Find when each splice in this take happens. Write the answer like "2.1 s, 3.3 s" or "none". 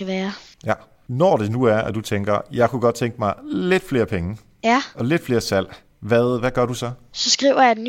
none